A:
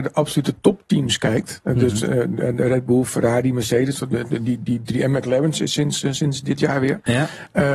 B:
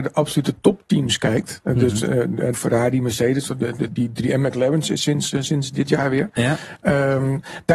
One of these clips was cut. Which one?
B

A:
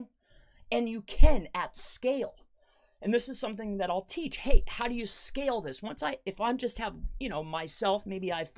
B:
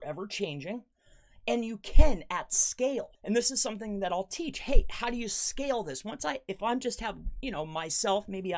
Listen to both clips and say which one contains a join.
B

